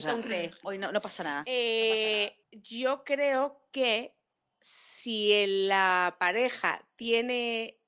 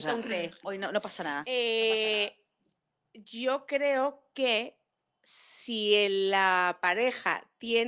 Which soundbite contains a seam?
first; 1 cut; at 2.4 s

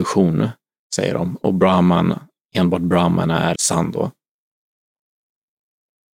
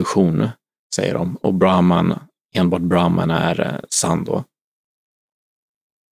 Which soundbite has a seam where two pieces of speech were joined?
first; 1 cut; at 3.6 s

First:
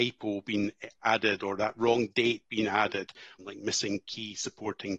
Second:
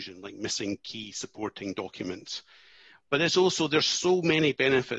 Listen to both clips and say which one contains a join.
first; 1 cut; at 3.4 s

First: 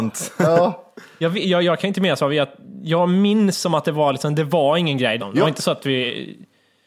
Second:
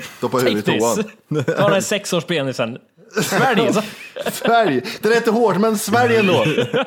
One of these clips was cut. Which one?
first; 1 cut; at 5.2 s

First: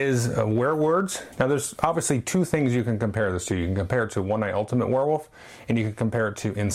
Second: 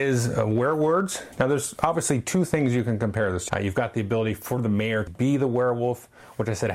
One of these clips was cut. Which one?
second; 2 cuts; at 3.5 s, 5.1 s

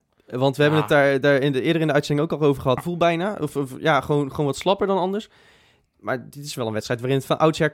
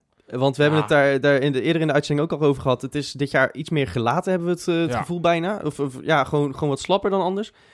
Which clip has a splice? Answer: first; 1 cut; at 2.8 s

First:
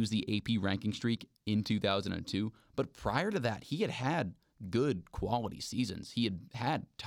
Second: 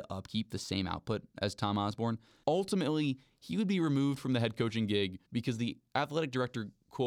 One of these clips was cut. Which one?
second; 2 cuts; at 2.4 s, 5.3 s

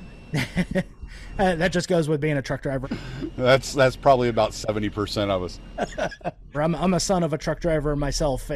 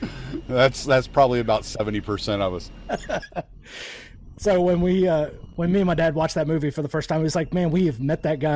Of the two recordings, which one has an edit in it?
first; 2 cuts; at 2.8 s, 6.5 s

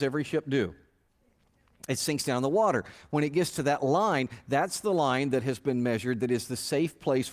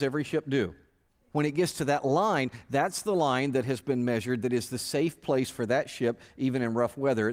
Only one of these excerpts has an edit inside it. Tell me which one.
second; 1 cut; at 1.3 s

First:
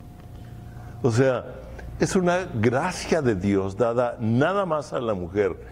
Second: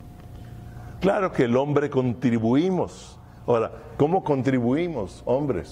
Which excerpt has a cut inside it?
second; 1 cut; at 1.0 s

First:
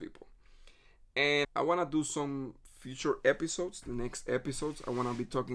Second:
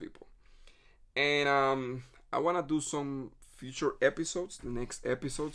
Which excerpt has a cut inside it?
first; 1 cut; at 1.4 s

